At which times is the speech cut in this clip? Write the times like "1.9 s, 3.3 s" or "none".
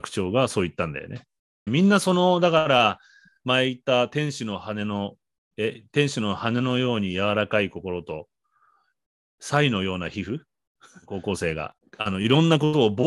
1.7 s, 11.8 s